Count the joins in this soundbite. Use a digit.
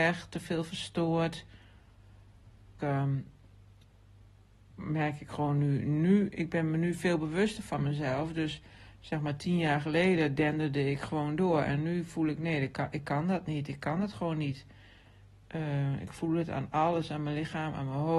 1